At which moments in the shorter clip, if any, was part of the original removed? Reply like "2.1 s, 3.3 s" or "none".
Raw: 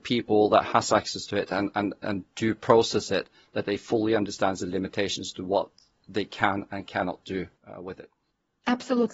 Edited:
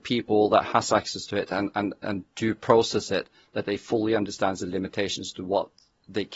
none